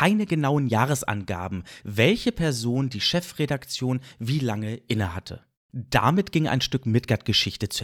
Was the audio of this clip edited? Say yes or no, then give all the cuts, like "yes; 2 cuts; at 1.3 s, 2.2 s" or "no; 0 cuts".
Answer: yes; 2 cuts; at 1.8 s, 5.6 s